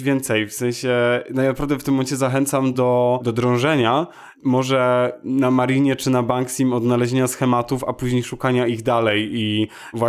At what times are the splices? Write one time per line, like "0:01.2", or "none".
none